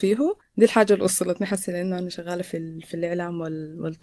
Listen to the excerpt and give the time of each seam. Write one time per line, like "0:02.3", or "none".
none